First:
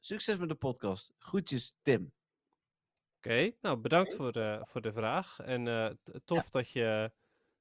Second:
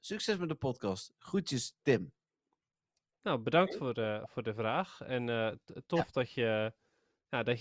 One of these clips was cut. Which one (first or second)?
second